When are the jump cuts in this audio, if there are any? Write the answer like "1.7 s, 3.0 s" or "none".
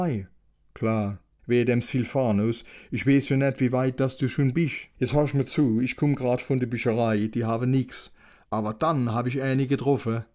none